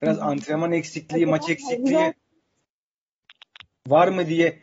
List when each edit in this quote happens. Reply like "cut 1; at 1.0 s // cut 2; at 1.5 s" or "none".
none